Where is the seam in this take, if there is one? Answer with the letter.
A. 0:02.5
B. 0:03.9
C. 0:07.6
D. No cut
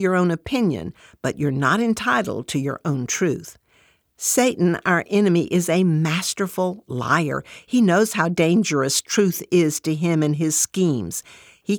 D